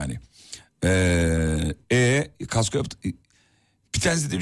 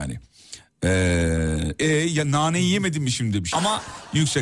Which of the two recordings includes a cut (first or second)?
second